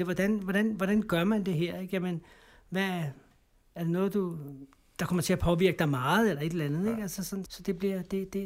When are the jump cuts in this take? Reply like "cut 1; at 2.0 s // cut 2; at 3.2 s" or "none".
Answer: cut 1; at 7.5 s